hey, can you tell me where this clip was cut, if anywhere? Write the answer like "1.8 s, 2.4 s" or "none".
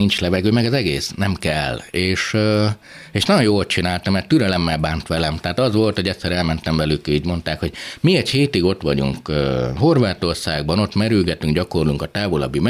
none